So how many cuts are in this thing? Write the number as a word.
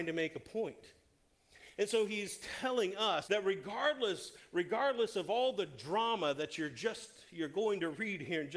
one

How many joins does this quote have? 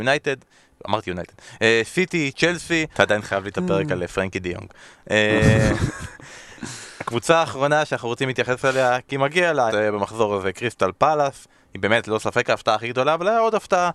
two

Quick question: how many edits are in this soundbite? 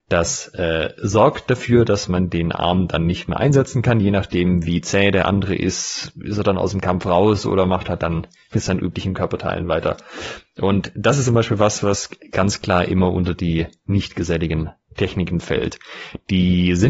zero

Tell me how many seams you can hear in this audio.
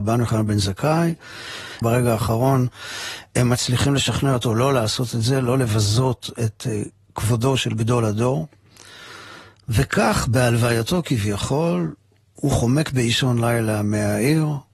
one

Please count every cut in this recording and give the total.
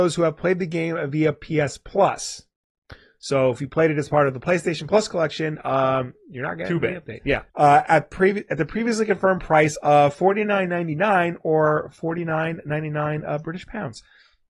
one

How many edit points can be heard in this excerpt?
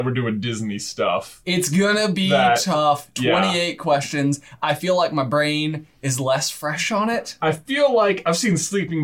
zero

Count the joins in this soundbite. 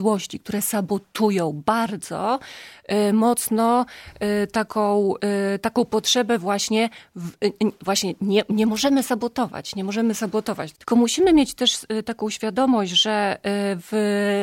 one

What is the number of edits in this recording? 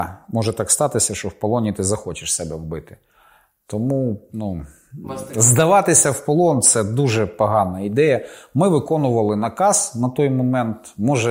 zero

